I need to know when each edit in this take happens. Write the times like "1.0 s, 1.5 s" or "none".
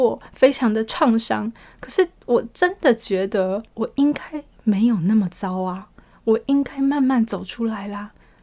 none